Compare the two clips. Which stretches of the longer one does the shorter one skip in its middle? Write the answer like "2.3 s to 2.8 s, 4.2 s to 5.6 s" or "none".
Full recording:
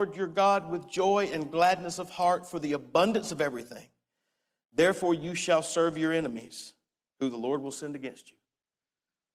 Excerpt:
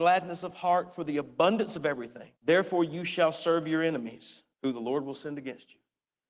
3.9 s to 4.7 s, 6.8 s to 7.1 s